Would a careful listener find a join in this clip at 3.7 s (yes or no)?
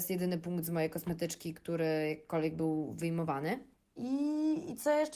yes